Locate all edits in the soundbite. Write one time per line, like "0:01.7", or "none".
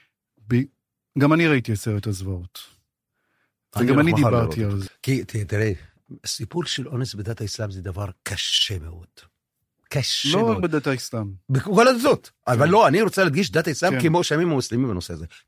0:04.9